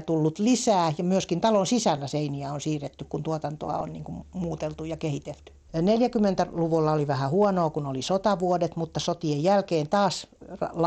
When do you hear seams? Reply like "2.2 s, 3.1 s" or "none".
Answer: 5.7 s